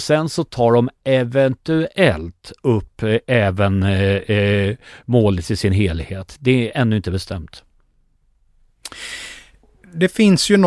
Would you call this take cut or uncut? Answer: uncut